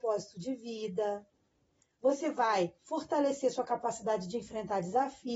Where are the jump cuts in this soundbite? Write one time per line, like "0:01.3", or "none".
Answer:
none